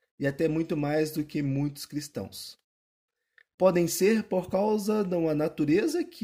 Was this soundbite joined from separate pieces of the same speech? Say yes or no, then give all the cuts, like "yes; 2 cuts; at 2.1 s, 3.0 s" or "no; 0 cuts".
no; 0 cuts